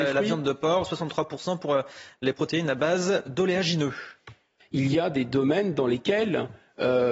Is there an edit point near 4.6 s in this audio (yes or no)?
yes